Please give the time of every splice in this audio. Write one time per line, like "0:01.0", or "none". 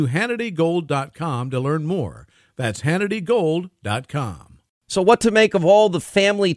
none